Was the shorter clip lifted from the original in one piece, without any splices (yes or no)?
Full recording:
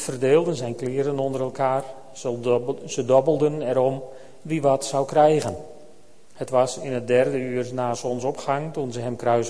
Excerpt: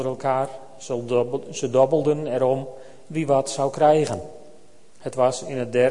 yes